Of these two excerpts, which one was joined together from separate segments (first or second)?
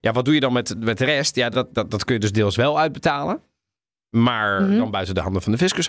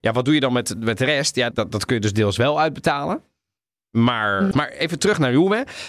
second